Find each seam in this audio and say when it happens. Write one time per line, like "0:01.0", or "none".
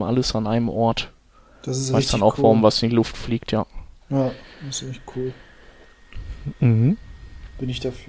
none